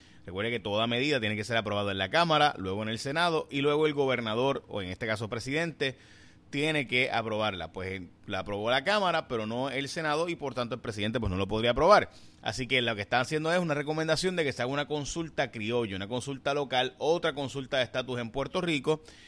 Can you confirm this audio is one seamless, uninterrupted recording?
yes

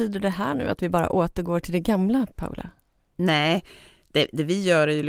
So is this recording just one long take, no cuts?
yes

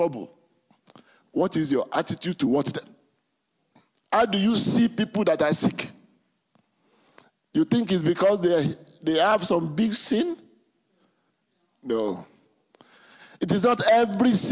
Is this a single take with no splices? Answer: yes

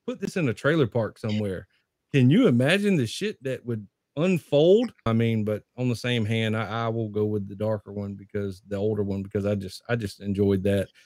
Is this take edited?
yes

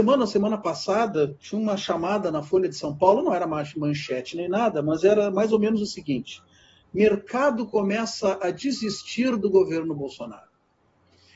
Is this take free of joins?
yes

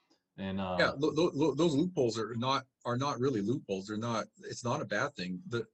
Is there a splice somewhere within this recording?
no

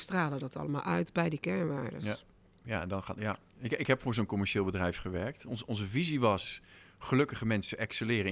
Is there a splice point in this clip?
no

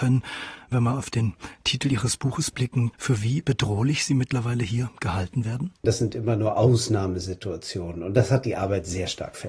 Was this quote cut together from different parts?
yes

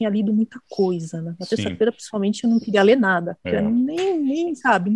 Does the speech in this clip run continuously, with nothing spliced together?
yes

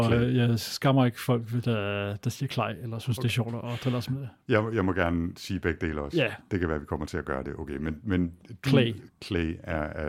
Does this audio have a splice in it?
no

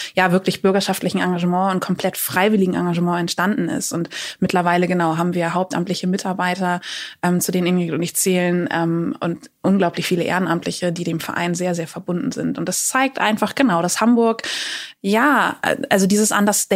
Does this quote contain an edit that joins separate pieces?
no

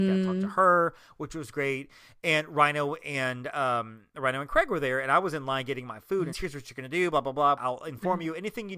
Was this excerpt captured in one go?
no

